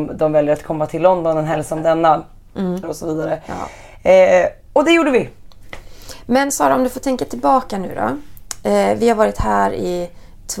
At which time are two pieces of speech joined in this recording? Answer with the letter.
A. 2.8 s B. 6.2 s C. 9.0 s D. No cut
A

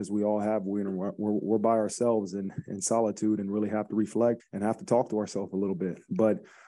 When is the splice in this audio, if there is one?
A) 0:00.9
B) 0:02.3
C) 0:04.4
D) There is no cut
C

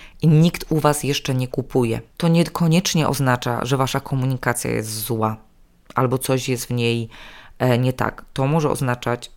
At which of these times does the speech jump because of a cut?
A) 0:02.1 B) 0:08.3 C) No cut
A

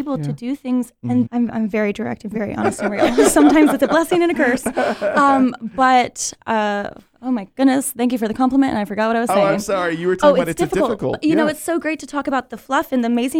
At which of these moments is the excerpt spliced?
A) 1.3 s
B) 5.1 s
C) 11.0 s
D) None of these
A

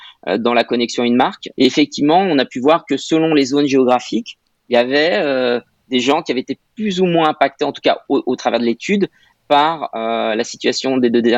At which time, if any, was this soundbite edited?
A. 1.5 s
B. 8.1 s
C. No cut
A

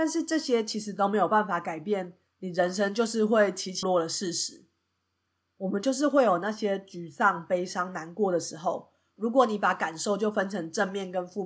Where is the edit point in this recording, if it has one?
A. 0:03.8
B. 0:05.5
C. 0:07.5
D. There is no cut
A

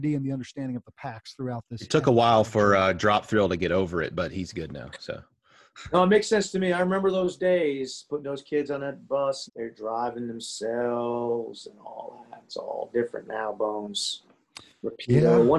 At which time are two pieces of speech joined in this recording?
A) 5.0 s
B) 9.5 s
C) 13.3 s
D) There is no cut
B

